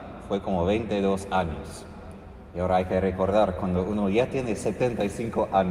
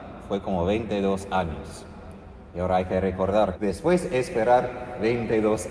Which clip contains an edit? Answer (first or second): second